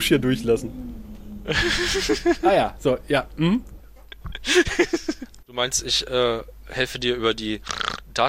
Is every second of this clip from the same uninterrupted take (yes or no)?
no